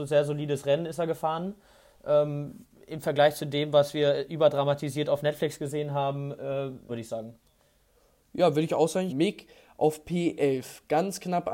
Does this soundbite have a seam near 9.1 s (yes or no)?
yes